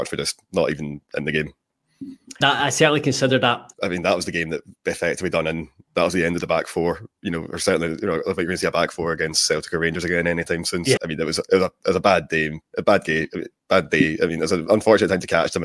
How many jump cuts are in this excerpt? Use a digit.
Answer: 3